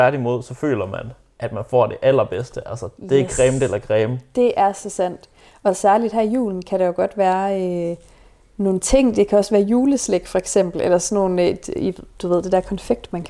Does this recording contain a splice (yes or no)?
no